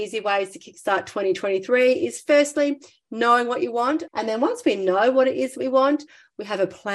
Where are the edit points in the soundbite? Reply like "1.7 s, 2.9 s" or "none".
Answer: 4.1 s